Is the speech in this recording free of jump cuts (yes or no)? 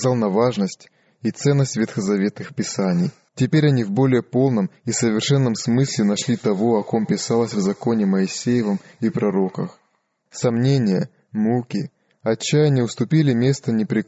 no